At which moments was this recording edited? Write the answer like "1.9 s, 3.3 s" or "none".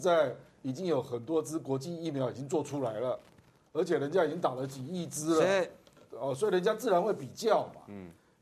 none